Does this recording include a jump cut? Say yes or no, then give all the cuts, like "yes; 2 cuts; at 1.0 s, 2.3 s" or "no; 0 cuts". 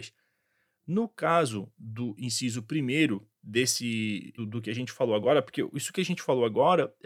yes; 1 cut; at 4.4 s